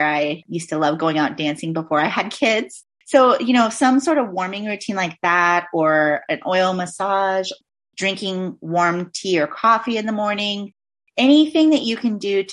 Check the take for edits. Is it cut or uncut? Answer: uncut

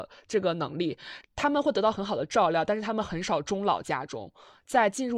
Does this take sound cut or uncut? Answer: cut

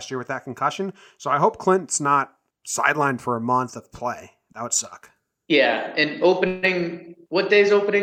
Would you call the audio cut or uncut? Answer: uncut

